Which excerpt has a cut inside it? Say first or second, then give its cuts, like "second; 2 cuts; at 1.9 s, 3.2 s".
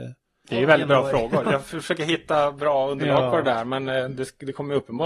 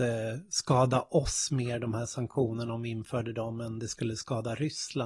first; 1 cut; at 1.4 s